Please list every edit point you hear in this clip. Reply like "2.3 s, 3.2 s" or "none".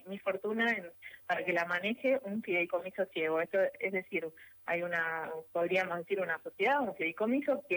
none